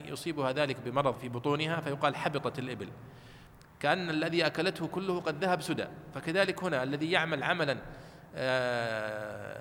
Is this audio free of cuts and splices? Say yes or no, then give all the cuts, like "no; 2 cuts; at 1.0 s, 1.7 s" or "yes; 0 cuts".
no; 1 cut; at 1.2 s